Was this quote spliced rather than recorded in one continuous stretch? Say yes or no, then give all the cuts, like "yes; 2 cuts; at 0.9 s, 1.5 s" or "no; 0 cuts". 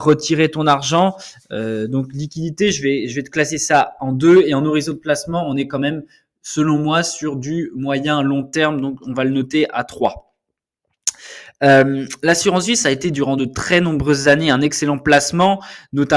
no; 0 cuts